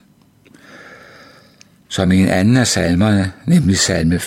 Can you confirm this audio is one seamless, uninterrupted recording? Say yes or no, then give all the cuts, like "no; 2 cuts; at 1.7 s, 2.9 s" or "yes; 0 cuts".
yes; 0 cuts